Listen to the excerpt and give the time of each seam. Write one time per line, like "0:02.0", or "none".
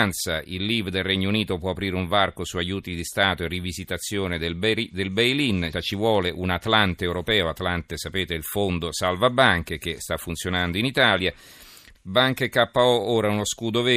0:05.7
0:11.9